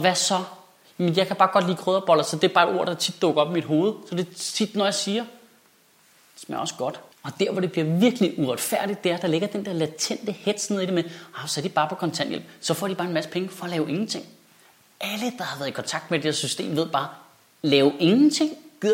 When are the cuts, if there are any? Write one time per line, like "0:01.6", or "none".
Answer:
none